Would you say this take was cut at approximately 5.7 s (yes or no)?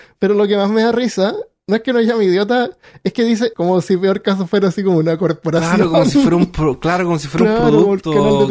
no